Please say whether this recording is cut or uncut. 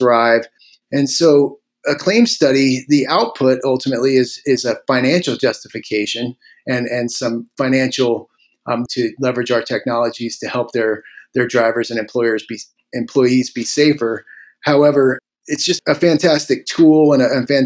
cut